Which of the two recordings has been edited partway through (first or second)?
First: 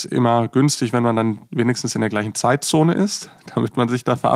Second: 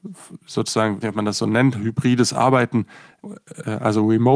second